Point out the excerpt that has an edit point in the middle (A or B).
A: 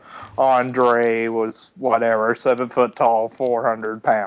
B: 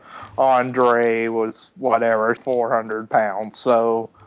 B